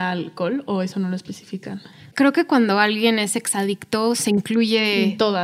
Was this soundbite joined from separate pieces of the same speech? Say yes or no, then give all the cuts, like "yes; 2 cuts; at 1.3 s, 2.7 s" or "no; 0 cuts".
no; 0 cuts